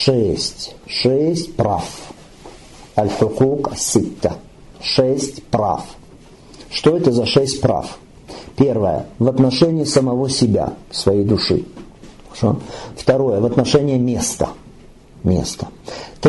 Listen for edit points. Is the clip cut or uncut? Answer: uncut